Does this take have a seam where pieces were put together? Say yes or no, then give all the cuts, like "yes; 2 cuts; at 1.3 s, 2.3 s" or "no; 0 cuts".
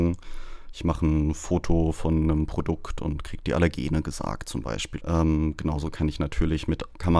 yes; 1 cut; at 5.0 s